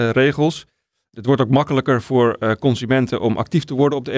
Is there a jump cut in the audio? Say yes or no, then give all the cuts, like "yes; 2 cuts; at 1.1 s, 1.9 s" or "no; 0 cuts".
no; 0 cuts